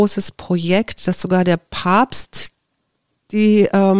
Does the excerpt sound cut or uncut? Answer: uncut